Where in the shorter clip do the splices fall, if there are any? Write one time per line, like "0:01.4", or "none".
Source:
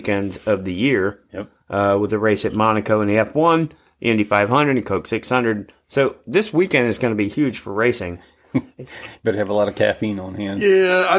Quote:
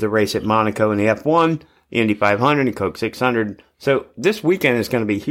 none